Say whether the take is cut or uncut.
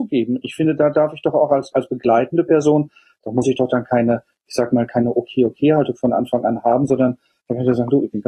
cut